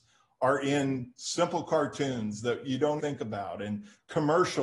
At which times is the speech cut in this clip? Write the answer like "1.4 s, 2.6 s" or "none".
3.0 s

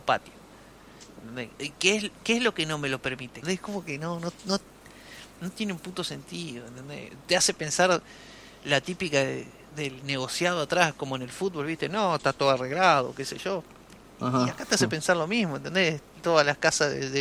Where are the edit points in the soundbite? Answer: 3.4 s

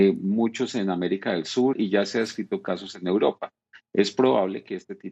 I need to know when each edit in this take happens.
1.7 s

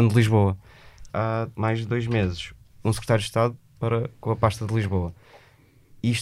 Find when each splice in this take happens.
1.1 s

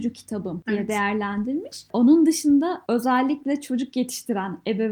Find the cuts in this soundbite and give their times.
none

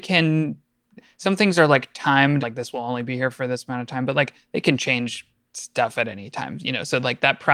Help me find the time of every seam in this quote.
2.4 s

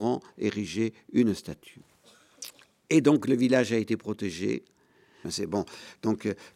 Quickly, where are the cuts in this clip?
5.2 s

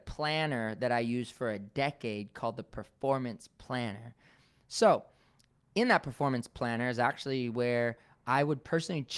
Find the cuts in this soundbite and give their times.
none

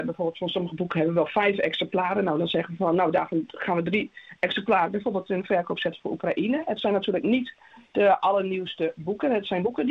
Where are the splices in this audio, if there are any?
none

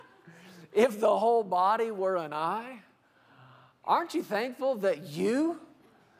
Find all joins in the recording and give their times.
none

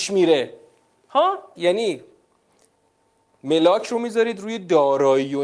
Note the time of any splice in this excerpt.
1.6 s

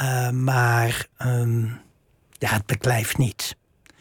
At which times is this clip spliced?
none

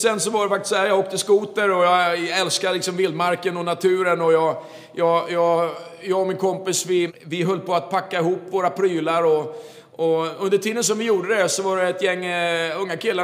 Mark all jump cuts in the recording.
7.1 s

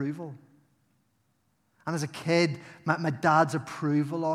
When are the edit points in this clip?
none

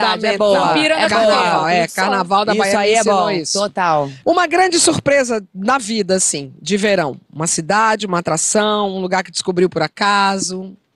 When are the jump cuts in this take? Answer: none

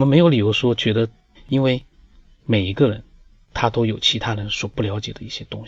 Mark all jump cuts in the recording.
1.3 s

